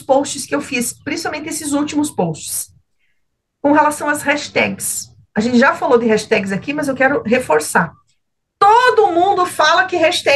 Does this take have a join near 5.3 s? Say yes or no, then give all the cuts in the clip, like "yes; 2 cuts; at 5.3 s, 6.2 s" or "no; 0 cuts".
no; 0 cuts